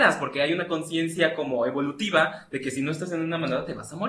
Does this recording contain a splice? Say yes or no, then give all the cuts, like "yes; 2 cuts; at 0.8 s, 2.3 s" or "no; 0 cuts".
no; 0 cuts